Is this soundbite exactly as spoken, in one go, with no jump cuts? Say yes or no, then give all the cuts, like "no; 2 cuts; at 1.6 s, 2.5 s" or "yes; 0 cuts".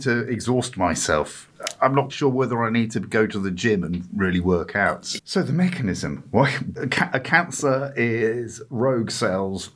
no; 3 cuts; at 2.1 s, 5.2 s, 6.8 s